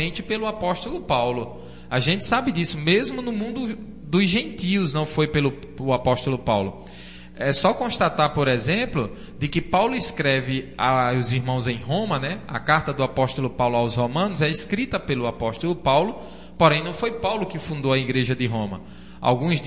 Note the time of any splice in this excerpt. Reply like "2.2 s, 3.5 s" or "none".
none